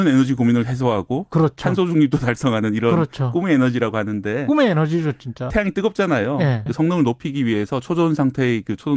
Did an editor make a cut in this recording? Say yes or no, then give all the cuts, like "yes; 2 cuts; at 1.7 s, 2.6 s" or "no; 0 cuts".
yes; 2 cuts; at 5.5 s, 6.7 s